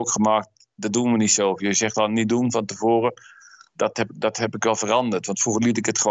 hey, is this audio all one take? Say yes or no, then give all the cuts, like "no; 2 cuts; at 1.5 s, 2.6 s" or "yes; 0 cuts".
yes; 0 cuts